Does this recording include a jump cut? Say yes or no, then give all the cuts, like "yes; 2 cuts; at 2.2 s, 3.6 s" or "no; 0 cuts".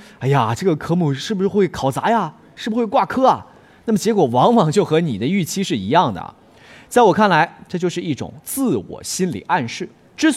no; 0 cuts